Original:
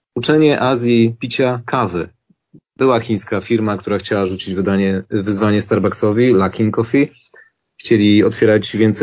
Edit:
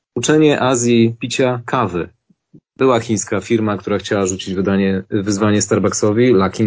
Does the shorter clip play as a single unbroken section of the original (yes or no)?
yes